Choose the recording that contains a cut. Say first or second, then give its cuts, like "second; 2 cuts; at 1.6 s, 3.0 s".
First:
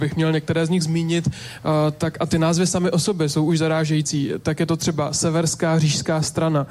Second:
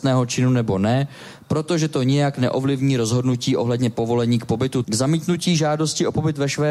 second; 1 cut; at 4.8 s